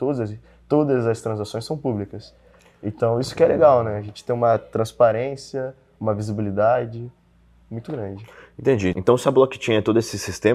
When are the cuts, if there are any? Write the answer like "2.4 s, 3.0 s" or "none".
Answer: none